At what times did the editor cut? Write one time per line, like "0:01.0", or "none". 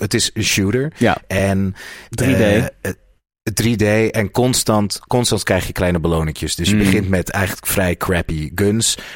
none